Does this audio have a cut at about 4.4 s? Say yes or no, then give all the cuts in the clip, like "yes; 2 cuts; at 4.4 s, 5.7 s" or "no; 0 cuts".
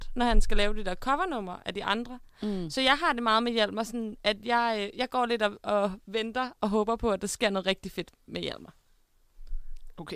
no; 0 cuts